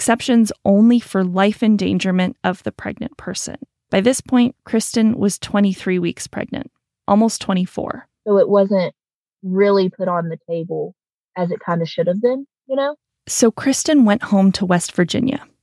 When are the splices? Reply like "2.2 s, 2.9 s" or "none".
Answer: none